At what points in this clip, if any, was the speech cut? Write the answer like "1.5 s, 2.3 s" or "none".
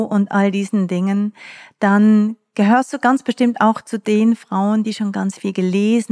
none